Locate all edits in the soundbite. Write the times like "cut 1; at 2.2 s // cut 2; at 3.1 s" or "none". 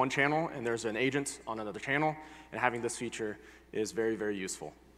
none